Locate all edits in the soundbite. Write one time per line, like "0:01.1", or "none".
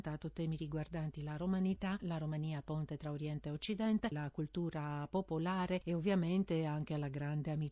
0:02.0
0:04.1